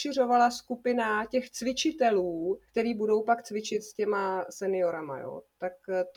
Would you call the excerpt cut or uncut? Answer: cut